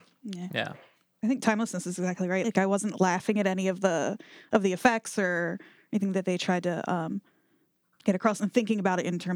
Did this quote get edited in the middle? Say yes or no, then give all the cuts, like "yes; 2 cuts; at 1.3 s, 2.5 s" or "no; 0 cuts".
yes; 1 cut; at 2.4 s